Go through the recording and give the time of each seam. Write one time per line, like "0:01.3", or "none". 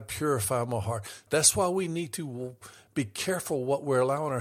0:01.3